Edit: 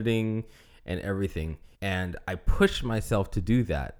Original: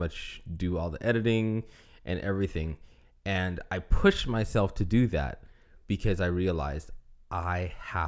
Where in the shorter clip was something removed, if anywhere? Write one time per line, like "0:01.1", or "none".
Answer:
0:01.7